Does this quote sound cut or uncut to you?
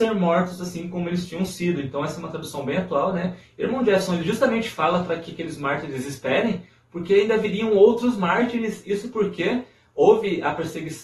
uncut